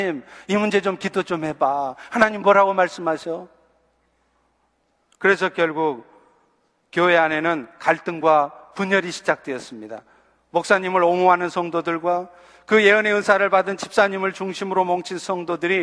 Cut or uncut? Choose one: uncut